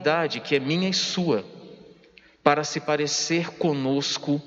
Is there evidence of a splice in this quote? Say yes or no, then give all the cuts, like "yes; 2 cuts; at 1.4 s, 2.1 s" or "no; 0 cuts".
no; 0 cuts